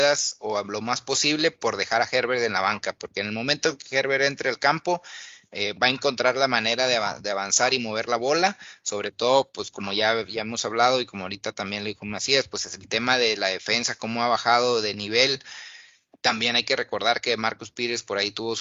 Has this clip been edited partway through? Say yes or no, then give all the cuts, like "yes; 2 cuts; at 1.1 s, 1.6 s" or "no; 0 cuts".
no; 0 cuts